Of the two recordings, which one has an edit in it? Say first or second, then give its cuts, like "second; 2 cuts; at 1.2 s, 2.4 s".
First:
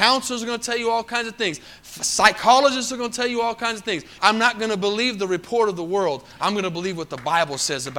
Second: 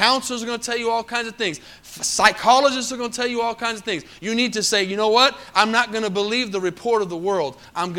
first; 2 cuts; at 4.2 s, 6.4 s